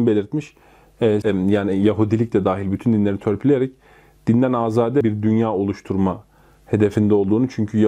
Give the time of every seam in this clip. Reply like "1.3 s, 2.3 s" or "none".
1.2 s